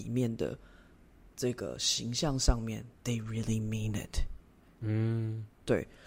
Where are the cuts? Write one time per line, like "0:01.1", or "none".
0:04.8